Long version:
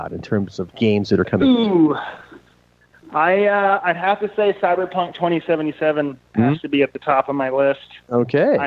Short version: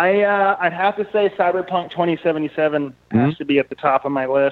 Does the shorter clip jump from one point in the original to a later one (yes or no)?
no